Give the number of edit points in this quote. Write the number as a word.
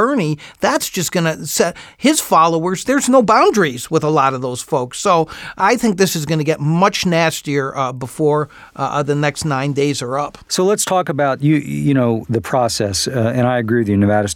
one